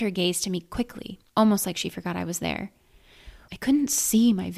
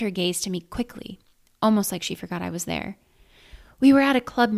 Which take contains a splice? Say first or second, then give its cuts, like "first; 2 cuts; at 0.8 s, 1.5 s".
first; 2 cuts; at 1.3 s, 3.5 s